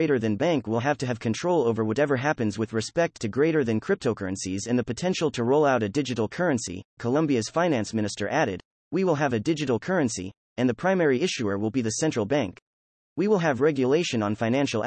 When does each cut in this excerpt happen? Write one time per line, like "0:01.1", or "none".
0:07.0